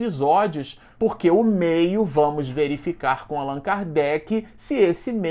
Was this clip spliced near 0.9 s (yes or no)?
yes